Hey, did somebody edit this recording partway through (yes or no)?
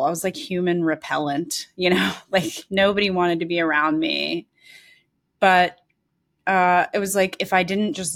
no